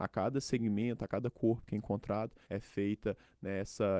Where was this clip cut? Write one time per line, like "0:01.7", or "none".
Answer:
0:02.5